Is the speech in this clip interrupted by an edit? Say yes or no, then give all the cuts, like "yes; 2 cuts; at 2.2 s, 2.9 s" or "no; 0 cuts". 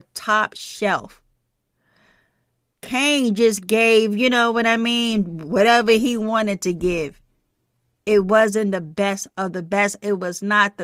no; 0 cuts